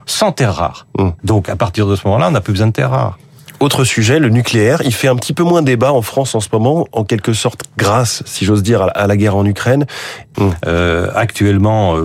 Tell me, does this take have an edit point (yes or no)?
yes